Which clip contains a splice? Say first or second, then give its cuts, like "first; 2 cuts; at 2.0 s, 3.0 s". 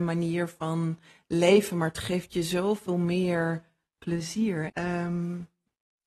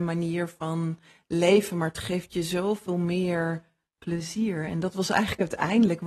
first; 1 cut; at 4.7 s